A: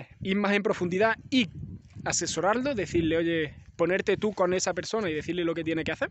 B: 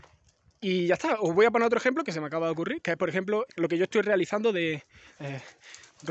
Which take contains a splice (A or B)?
B